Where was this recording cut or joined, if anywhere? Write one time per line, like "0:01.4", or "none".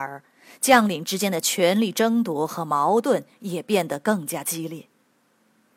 none